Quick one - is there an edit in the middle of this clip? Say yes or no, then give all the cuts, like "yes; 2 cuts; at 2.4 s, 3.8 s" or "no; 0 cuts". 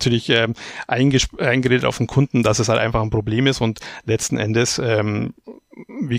no; 0 cuts